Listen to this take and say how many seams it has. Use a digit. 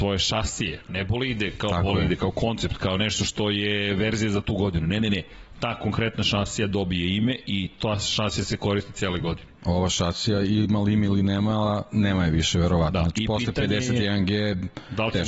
0